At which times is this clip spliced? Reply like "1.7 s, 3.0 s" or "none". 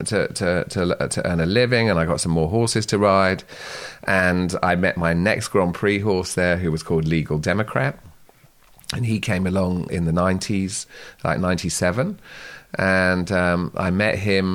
9.9 s